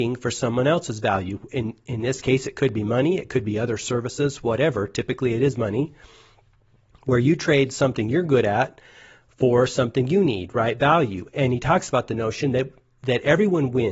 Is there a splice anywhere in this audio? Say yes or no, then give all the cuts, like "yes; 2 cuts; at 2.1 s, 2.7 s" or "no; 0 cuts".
no; 0 cuts